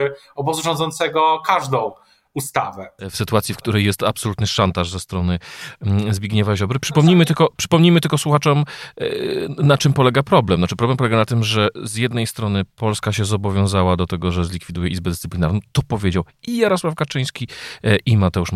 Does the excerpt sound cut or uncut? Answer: cut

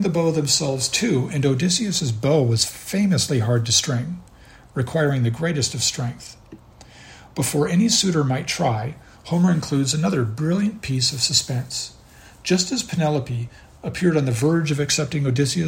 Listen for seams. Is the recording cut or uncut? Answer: uncut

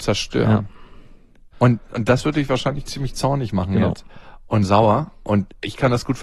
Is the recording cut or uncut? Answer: cut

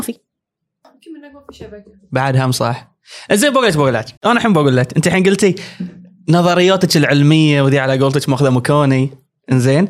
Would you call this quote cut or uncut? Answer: cut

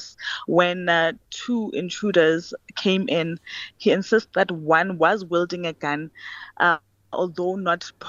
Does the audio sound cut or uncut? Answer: uncut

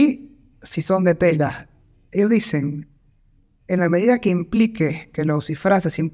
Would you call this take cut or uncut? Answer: cut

